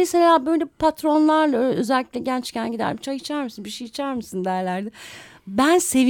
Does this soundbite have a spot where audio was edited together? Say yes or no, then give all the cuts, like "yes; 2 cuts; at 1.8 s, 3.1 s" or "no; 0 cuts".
no; 0 cuts